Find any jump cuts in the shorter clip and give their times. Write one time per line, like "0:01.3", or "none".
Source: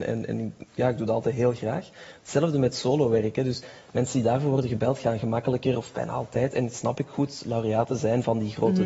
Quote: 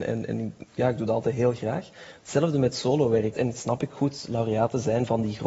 0:03.3